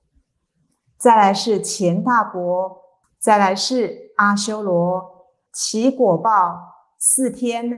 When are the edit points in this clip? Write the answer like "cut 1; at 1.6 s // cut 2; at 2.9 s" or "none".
cut 1; at 3.0 s // cut 2; at 5.5 s